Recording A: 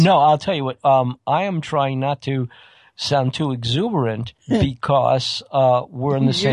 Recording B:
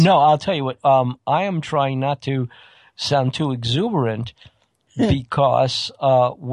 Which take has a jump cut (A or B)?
A